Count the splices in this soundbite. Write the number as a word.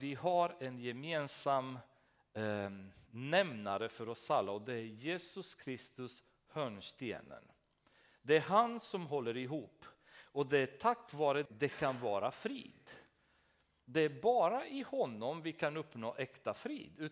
one